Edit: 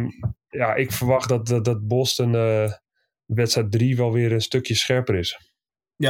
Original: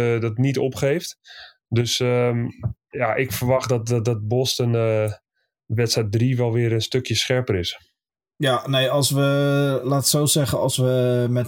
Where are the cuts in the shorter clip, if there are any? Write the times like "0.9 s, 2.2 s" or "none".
none